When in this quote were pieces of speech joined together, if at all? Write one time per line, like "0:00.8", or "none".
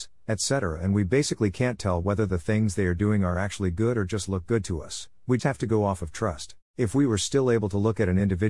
0:05.4
0:06.7